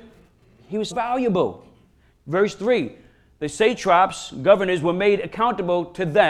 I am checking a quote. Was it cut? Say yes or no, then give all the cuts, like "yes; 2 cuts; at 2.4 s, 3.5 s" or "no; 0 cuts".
yes; 1 cut; at 0.9 s